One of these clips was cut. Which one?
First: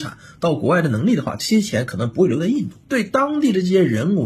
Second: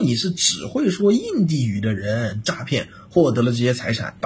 first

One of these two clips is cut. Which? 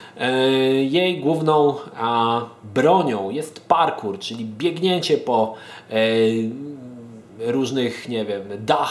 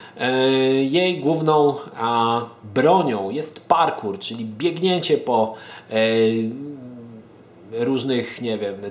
first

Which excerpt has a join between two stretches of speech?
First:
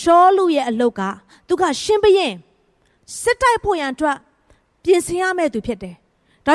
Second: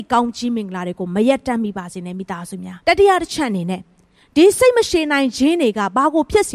second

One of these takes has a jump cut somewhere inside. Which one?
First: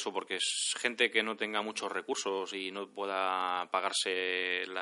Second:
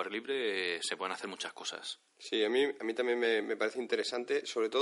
second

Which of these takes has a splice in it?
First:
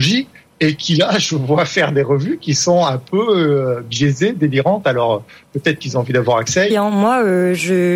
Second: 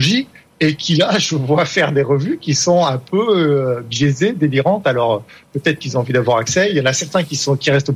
first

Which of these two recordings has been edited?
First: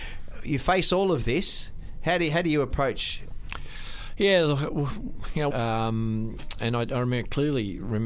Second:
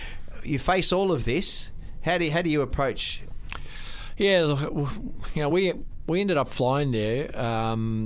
first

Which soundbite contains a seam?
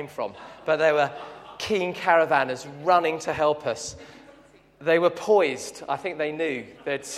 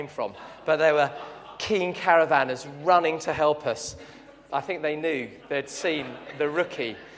second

